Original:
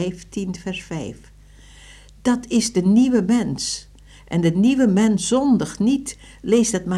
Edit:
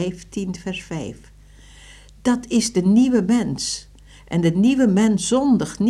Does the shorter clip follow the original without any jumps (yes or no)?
yes